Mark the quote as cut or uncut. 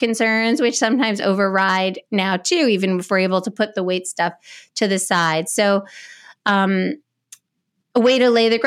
uncut